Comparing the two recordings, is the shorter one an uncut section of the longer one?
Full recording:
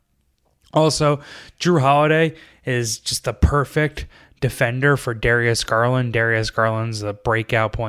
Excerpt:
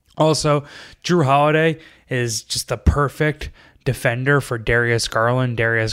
yes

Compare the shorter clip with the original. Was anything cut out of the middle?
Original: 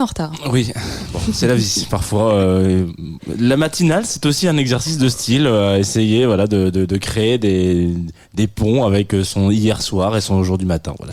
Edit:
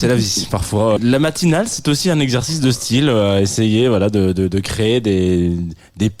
yes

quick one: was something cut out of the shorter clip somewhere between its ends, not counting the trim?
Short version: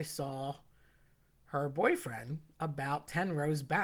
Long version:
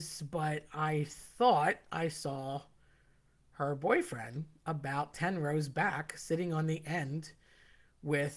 no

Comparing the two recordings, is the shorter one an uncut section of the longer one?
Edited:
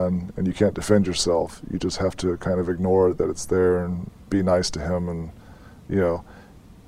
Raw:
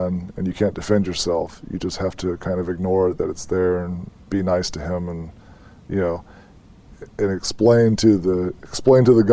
yes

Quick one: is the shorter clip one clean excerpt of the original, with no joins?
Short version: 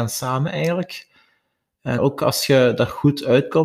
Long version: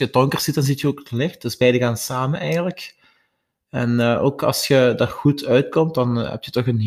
no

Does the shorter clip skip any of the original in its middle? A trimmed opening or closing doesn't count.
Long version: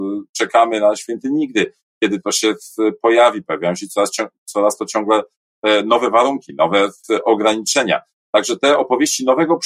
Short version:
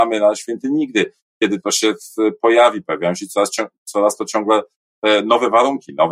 no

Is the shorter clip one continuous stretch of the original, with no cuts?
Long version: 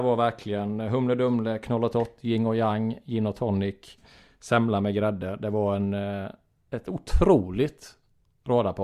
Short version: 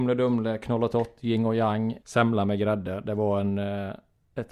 no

